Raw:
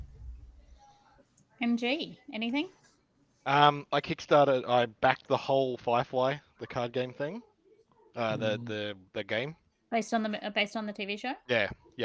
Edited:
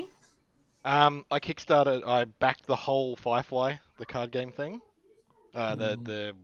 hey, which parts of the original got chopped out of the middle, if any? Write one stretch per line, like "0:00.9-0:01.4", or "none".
none